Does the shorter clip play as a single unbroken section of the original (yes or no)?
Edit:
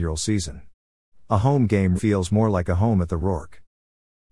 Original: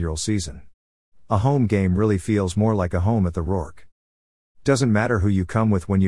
no